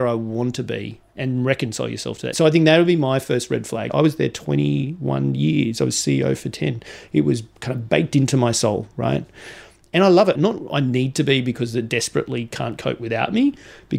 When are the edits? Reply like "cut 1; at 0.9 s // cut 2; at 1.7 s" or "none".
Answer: cut 1; at 2.3 s // cut 2; at 3.9 s // cut 3; at 10.3 s